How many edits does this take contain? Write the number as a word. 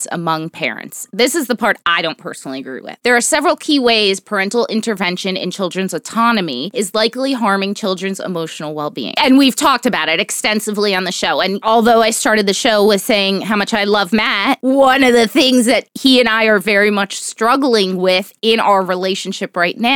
one